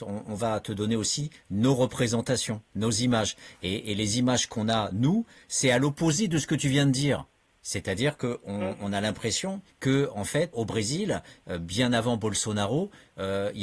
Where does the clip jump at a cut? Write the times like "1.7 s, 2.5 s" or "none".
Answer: 10.5 s